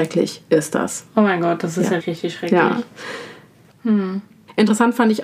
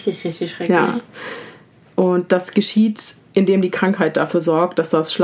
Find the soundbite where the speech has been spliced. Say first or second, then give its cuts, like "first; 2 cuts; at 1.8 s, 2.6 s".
first; 2 cuts; at 2.0 s, 3.7 s